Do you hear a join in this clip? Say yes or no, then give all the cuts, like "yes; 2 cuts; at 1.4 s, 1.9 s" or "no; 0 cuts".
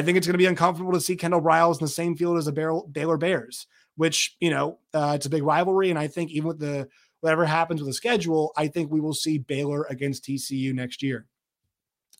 no; 0 cuts